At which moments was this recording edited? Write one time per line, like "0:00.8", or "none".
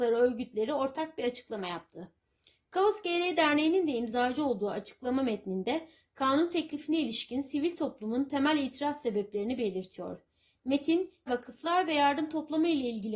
0:11.3